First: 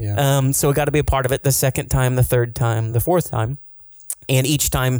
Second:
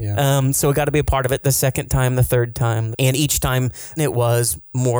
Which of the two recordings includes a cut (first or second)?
second